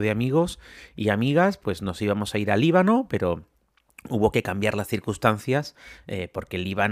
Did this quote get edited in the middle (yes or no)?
no